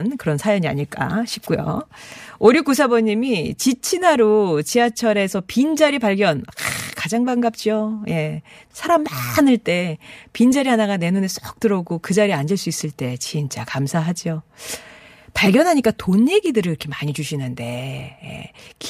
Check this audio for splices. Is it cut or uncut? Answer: cut